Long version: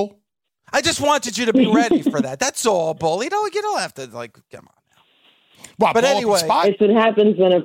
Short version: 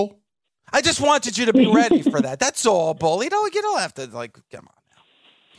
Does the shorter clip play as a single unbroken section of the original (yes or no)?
yes